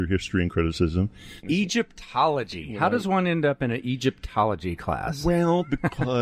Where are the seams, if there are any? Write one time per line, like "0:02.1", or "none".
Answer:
0:01.4